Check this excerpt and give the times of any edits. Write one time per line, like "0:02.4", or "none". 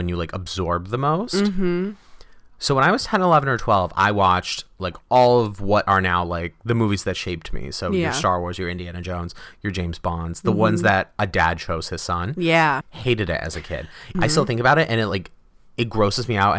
0:12.8
0:14.1